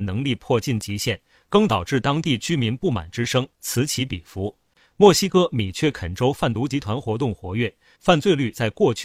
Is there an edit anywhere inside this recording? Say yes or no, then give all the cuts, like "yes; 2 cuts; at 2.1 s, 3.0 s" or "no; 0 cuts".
yes; 2 cuts; at 4.9 s, 8.0 s